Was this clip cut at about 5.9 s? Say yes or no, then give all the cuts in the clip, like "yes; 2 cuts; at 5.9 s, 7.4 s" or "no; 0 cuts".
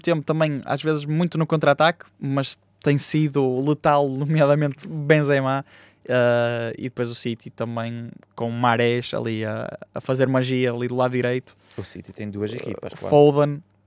no; 0 cuts